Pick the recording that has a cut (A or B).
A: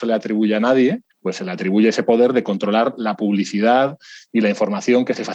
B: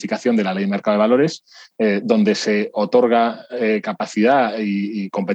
A